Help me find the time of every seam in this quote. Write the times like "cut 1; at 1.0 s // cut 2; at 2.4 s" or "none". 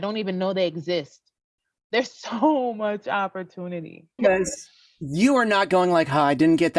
cut 1; at 4.2 s